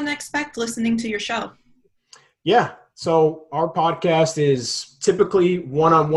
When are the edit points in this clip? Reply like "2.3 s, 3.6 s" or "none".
none